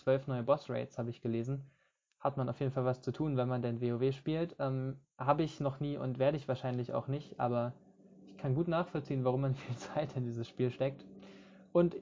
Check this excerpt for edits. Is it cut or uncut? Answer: uncut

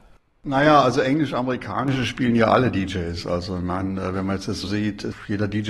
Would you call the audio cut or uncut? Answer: cut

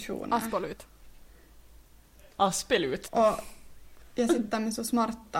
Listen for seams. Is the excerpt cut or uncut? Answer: cut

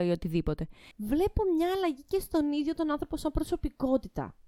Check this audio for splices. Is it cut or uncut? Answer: cut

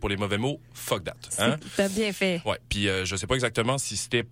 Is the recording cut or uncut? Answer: uncut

